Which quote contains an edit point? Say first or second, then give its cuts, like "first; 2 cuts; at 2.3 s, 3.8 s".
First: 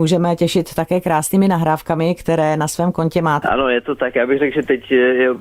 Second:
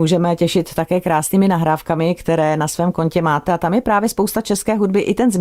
first; 1 cut; at 3.4 s